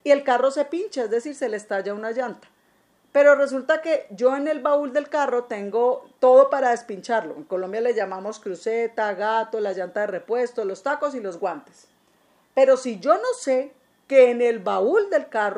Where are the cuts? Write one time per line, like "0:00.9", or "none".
none